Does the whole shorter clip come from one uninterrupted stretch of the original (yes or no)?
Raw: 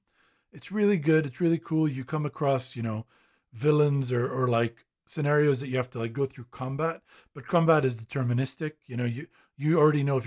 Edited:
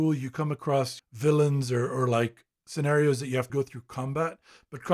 no